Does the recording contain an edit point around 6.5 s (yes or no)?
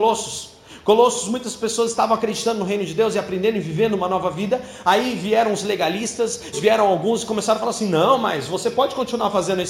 yes